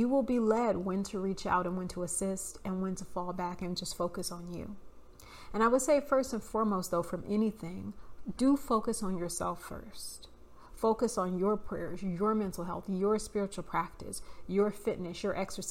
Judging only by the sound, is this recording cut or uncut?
uncut